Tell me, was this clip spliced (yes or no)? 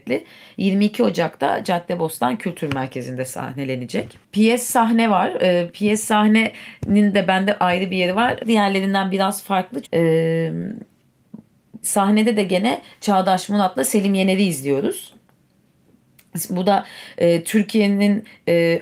yes